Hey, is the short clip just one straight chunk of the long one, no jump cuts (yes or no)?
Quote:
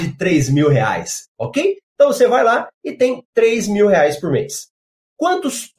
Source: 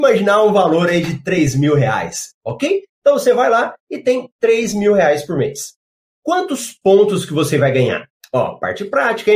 yes